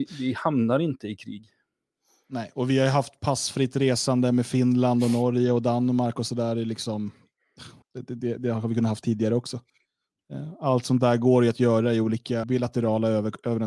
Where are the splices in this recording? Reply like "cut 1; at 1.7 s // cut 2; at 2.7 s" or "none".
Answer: cut 1; at 7.8 s // cut 2; at 12.4 s

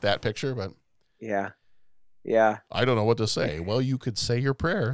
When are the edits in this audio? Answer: none

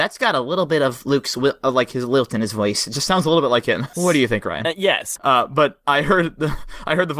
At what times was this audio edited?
cut 1; at 3.9 s // cut 2; at 5.2 s

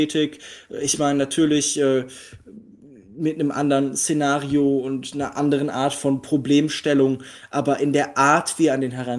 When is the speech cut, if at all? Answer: none

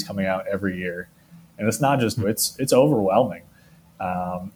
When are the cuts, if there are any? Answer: cut 1; at 2.2 s

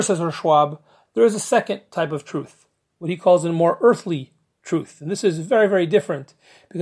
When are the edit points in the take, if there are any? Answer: none

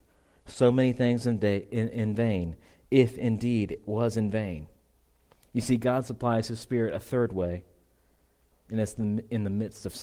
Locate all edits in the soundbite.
none

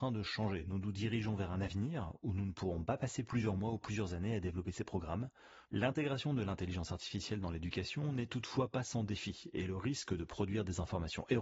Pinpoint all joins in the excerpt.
cut 1; at 5.7 s

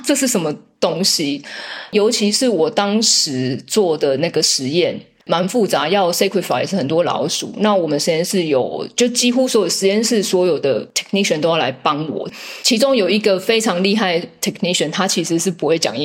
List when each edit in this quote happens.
none

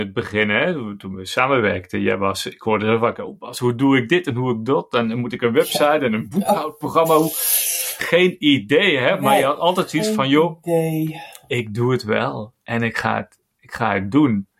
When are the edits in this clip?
none

